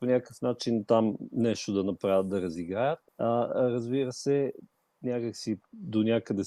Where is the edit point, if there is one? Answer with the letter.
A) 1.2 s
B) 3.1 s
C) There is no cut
B